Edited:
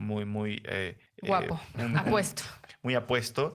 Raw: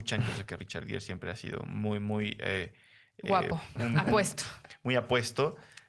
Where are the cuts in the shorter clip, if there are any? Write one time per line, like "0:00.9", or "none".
0:01.1